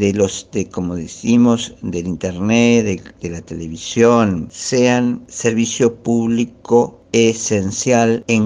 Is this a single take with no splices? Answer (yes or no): yes